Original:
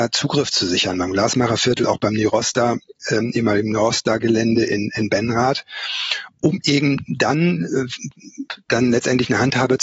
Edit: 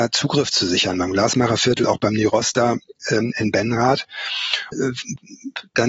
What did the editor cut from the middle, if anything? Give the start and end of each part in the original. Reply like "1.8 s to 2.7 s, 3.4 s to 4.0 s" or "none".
3.3 s to 4.9 s, 6.3 s to 7.7 s